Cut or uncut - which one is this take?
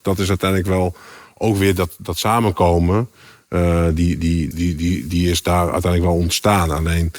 cut